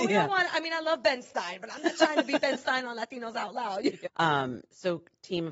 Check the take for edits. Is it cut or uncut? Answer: cut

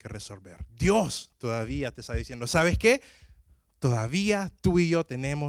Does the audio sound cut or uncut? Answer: uncut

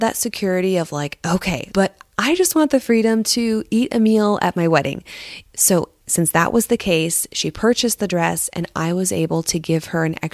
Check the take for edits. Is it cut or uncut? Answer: cut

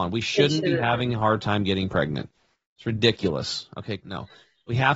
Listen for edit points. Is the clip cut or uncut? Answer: cut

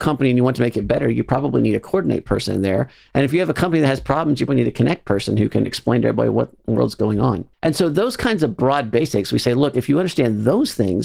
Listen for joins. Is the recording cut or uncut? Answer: cut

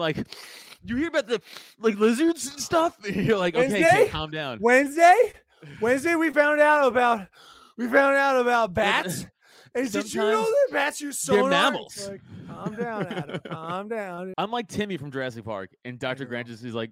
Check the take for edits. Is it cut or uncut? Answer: cut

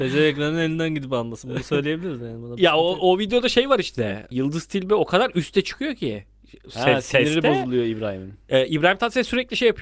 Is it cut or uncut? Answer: uncut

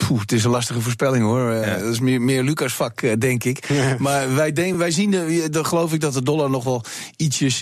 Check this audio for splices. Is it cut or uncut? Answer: uncut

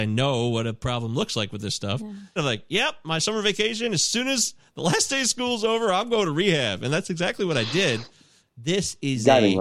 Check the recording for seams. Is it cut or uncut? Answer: cut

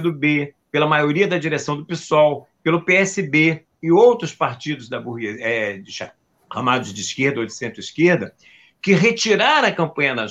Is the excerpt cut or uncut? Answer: uncut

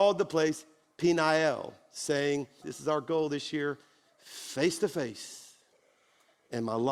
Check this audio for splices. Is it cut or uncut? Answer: cut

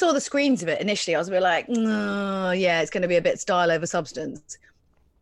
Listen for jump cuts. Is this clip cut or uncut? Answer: uncut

